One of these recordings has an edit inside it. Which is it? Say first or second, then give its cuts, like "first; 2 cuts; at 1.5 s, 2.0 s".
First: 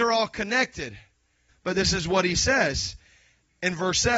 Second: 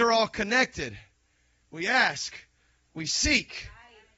first; 1 cut; at 1.5 s